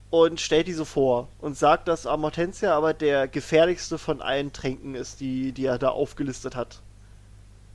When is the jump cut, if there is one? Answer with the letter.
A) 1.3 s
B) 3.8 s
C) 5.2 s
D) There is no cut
A